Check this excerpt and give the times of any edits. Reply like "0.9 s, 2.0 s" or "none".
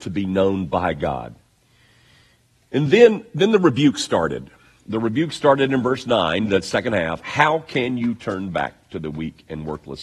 none